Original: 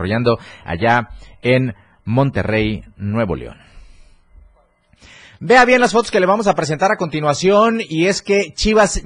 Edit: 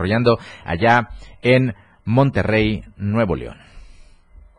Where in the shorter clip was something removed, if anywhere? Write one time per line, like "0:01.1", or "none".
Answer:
none